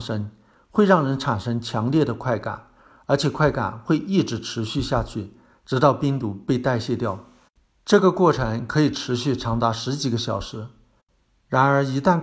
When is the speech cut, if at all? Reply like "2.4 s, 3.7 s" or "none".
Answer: none